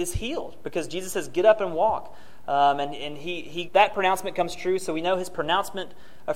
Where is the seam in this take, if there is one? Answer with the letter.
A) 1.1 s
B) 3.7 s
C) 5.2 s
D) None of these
B